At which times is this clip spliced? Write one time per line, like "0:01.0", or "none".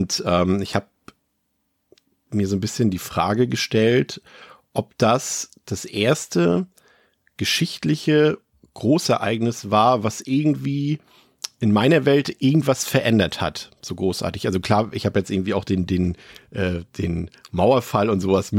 none